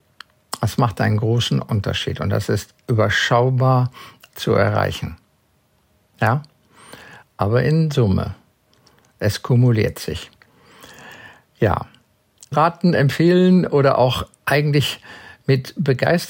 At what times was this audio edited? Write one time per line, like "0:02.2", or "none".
0:04.3
0:07.2
0:12.5